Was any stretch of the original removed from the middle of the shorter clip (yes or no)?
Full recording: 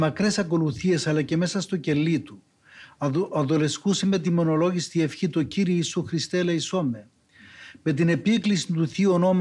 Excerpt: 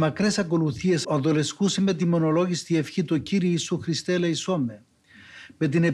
yes